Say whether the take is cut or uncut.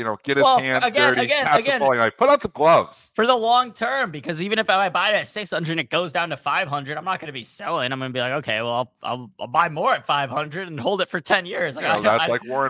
uncut